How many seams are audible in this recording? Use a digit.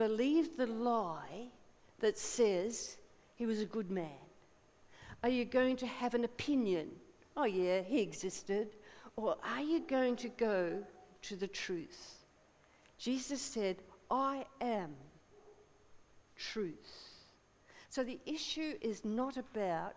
0